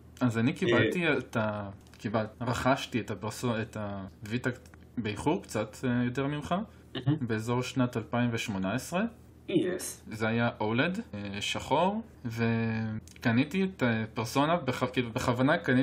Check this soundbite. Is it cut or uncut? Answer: cut